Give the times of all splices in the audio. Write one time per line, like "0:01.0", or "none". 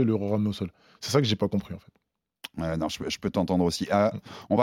0:01.4